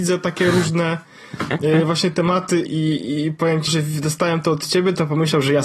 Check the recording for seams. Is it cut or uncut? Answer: cut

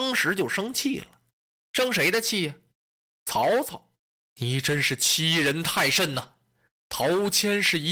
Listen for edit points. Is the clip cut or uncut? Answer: uncut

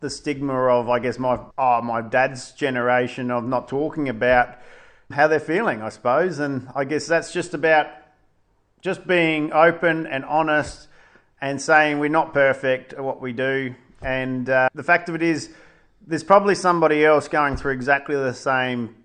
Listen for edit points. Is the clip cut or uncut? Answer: uncut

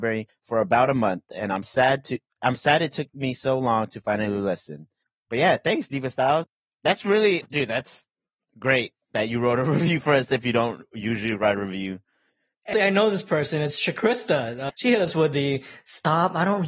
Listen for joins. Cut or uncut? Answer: cut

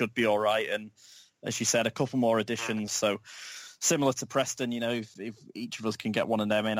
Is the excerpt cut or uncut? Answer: cut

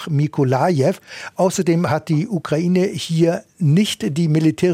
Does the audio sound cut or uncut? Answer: uncut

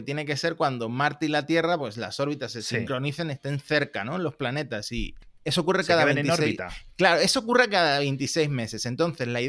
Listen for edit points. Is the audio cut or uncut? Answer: uncut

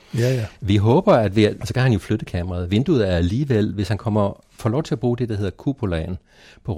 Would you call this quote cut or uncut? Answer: cut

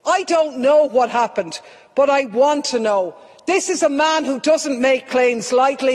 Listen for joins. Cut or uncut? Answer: uncut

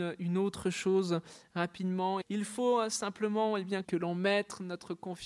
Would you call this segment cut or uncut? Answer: cut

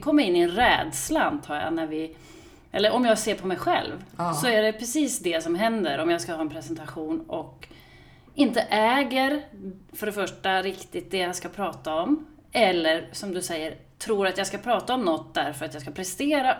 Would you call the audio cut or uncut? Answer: uncut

